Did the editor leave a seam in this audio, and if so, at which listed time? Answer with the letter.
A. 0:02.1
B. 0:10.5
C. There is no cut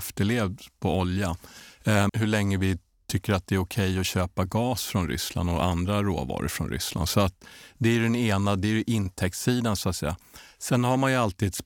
A